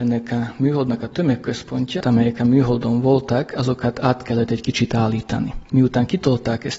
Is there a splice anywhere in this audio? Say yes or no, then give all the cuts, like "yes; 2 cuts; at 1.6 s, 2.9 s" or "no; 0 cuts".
yes; 2 cuts; at 2.0 s, 5.7 s